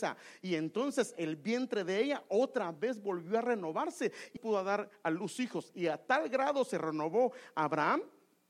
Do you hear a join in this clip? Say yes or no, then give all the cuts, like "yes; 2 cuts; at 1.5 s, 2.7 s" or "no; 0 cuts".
yes; 1 cut; at 4.4 s